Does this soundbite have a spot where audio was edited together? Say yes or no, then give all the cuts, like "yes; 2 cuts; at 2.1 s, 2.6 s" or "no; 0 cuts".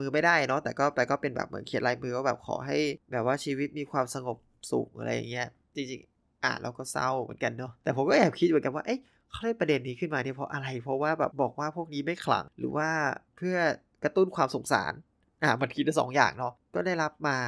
yes; 2 cuts; at 11.3 s, 13.3 s